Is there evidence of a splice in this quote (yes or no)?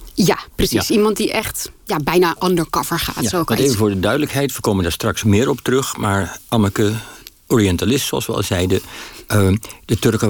no